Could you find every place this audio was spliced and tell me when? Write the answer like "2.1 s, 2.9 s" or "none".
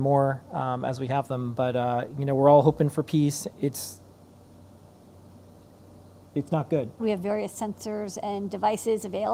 3.5 s, 7.0 s